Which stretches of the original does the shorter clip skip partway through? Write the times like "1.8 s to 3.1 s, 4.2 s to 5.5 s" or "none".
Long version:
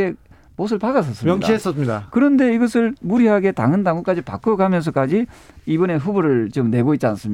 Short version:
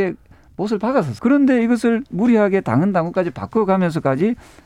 1.2 s to 2.1 s